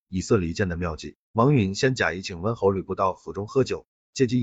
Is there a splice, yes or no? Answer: no